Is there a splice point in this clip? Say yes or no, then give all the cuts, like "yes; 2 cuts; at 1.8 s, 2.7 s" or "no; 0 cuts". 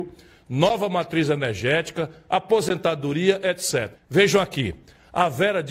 yes; 1 cut; at 3.9 s